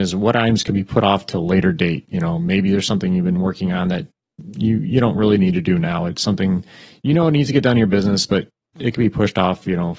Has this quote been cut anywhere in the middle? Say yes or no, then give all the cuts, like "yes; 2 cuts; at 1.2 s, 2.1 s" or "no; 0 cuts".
no; 0 cuts